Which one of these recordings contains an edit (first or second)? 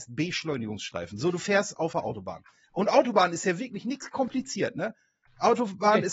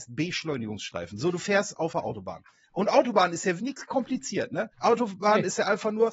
second